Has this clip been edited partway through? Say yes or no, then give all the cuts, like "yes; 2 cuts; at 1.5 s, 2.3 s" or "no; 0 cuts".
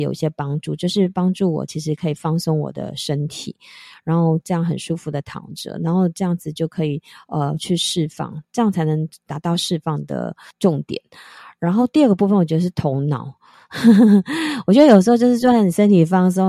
no; 0 cuts